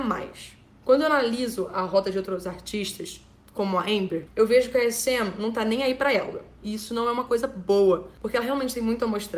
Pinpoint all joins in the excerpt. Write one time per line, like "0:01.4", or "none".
0:04.3
0:06.6